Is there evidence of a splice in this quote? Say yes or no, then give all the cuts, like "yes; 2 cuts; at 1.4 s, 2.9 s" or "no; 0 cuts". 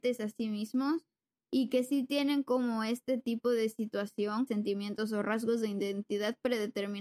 yes; 1 cut; at 4.5 s